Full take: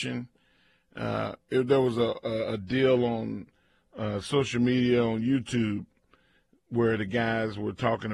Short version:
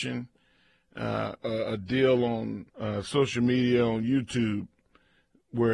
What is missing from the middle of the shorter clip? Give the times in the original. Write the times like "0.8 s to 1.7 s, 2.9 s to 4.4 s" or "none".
1.4 s to 2.2 s, 3.5 s to 3.9 s